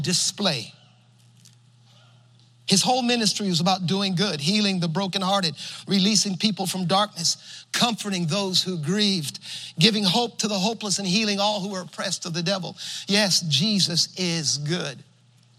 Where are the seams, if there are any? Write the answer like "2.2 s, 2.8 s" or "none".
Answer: none